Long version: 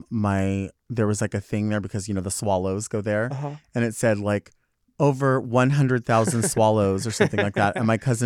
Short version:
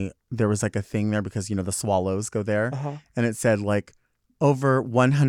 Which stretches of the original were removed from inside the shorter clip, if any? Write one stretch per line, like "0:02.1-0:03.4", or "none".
none